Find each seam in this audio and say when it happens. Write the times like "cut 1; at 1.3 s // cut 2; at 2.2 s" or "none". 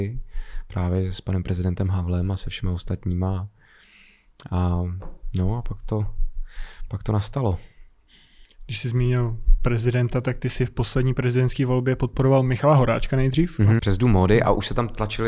cut 1; at 13.8 s